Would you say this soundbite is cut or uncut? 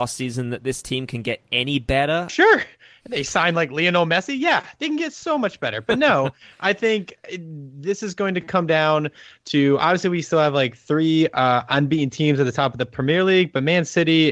cut